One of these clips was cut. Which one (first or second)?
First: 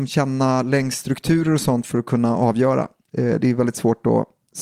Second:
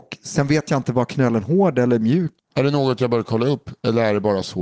second